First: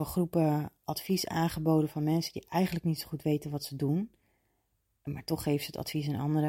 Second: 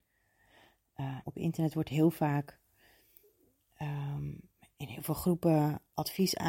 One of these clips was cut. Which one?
second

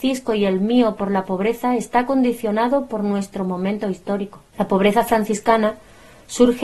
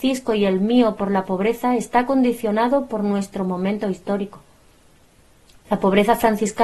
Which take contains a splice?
first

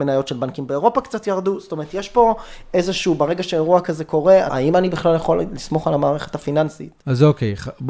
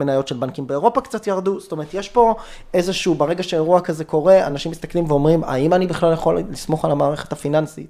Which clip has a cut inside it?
first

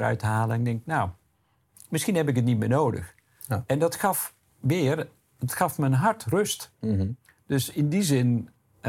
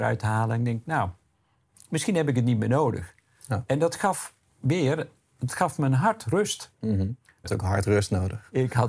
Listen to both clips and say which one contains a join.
second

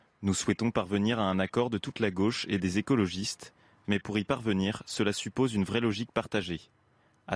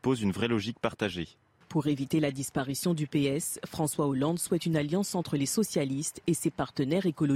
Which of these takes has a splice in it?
second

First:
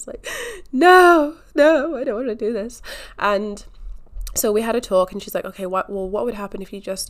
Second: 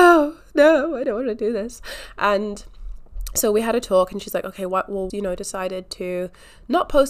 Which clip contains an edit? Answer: second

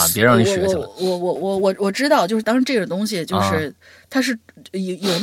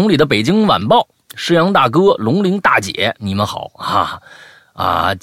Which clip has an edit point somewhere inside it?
first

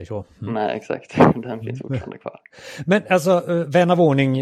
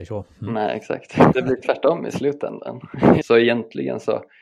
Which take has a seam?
second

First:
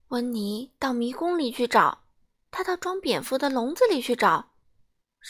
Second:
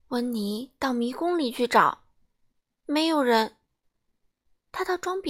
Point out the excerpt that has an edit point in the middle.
first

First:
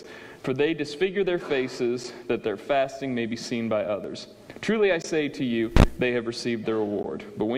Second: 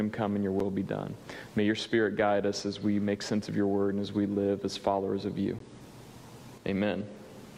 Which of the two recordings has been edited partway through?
second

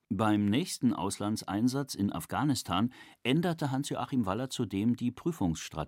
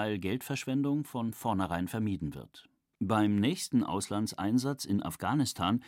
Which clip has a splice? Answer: second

